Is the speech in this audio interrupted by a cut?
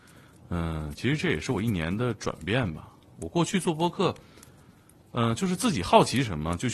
no; 0 cuts

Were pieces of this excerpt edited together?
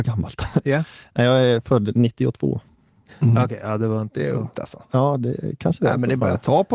no; 0 cuts

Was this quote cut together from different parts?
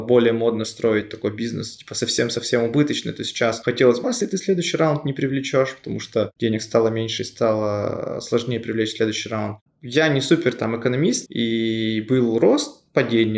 yes; 3 cuts; at 4.0 s, 9.7 s, 11.3 s

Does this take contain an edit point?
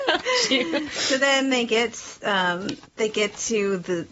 yes; 1 cut; at 2.9 s

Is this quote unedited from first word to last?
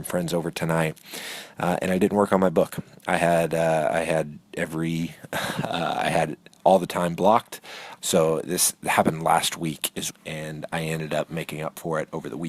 no; 2 cuts; at 8.0 s, 10.1 s

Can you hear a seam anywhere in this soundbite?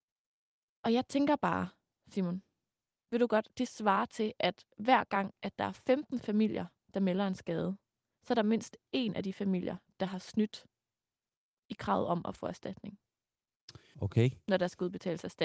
yes; 2 cuts; at 2.0 s, 13.9 s

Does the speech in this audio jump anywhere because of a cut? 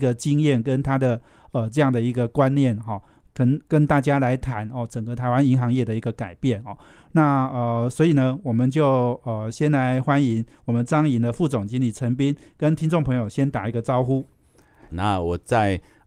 yes; 1 cut; at 14.9 s

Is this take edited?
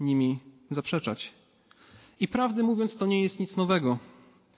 no; 0 cuts

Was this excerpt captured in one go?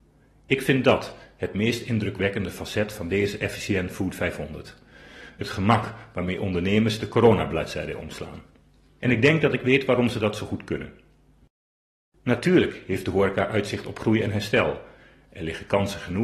yes; 0 cuts

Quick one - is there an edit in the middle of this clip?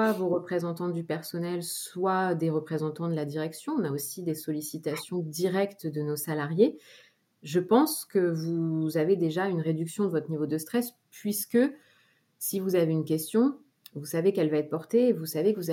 no; 0 cuts

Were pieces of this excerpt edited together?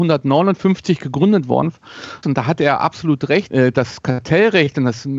yes; 2 cuts; at 2.2 s, 3.5 s

